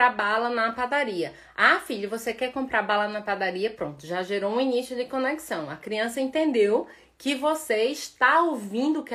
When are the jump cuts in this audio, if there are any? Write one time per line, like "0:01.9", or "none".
none